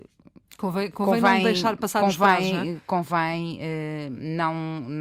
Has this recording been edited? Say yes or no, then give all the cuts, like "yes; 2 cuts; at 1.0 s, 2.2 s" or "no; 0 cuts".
no; 0 cuts